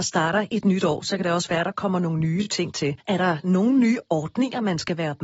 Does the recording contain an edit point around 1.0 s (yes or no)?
no